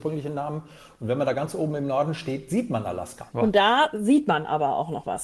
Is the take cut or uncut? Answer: cut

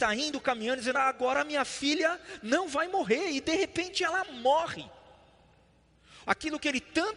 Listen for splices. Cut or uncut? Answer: cut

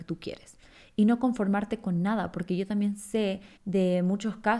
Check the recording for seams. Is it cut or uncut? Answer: cut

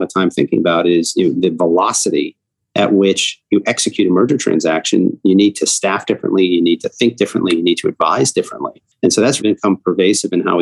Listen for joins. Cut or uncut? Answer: cut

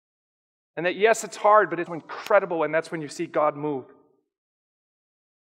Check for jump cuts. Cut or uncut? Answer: cut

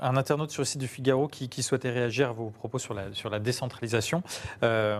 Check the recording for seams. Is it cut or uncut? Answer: uncut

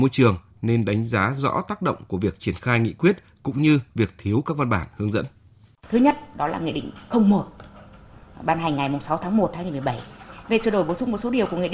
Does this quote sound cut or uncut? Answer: uncut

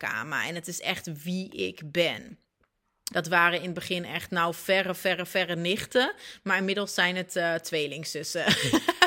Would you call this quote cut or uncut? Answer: cut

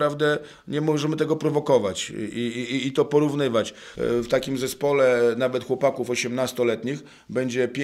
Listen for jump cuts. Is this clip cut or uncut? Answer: cut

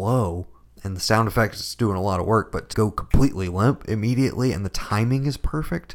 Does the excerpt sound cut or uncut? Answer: cut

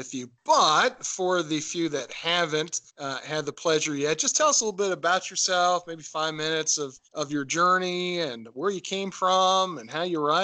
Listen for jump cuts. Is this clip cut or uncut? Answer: cut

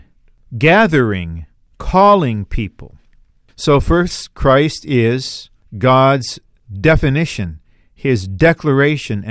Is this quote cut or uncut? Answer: uncut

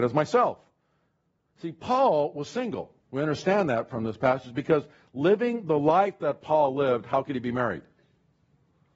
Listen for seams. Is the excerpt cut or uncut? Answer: cut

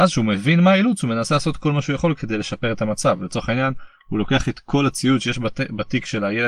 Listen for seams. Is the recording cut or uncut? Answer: uncut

